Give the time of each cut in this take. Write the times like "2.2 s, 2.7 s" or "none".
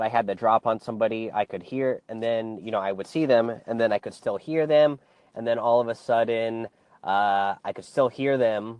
none